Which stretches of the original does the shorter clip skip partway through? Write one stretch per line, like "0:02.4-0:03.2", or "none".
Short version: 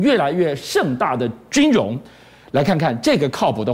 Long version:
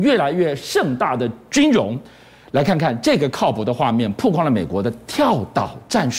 none